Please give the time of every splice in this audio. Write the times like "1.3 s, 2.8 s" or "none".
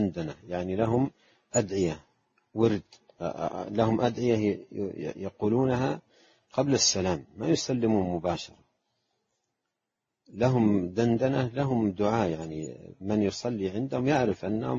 none